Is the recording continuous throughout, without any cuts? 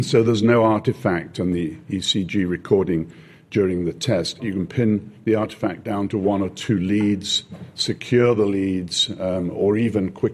no; 1 cut; at 4.4 s

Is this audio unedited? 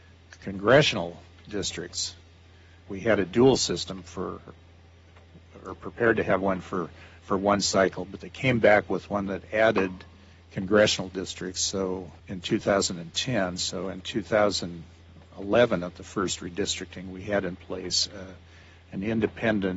no; 1 cut; at 2.8 s

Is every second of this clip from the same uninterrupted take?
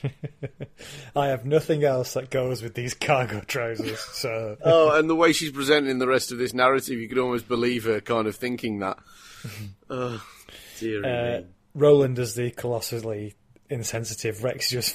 no; 2 cuts; at 4.6 s, 13.6 s

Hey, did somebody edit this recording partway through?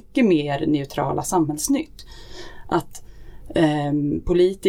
no; 0 cuts

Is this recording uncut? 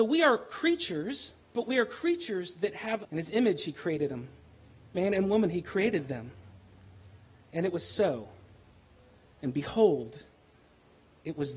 no; 2 cuts; at 1.4 s, 3.0 s

